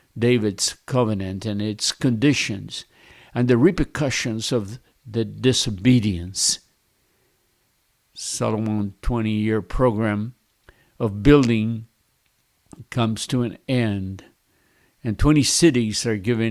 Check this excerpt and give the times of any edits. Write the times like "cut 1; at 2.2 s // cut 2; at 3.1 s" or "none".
none